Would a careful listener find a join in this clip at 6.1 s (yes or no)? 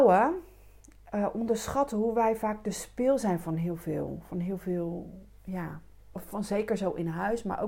yes